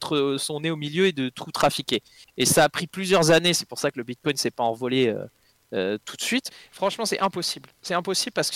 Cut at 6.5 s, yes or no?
yes